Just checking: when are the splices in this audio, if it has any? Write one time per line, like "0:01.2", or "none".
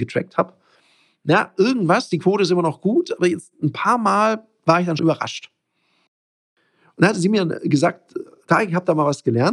0:05.0

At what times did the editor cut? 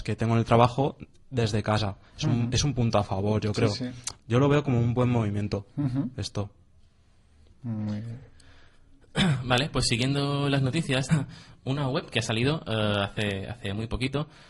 0:04.2
0:11.1

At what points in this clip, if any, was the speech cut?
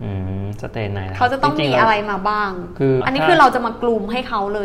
0:03.0

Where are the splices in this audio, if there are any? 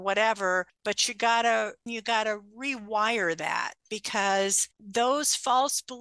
0:01.9

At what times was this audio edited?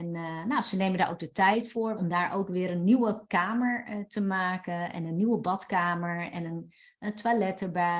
0:02.0

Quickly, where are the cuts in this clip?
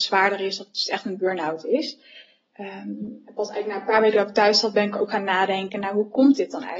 none

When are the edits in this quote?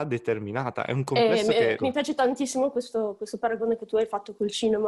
0:01.8

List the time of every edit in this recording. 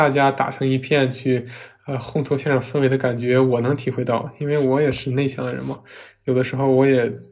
none

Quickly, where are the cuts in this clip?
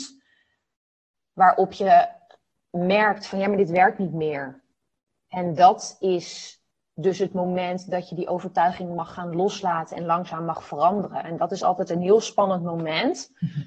none

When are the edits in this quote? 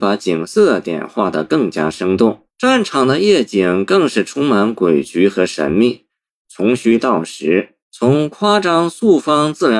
0:02.5
0:06.4
0:07.8

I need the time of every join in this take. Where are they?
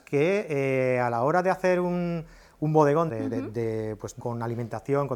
0:03.1
0:04.2

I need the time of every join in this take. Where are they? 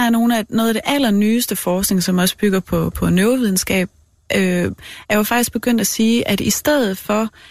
none

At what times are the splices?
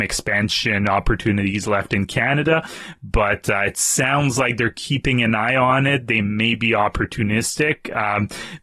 none

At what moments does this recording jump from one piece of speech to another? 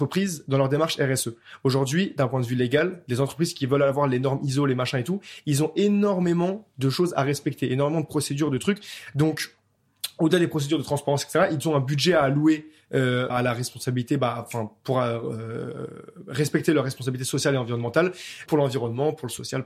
0:13.3
0:18.5

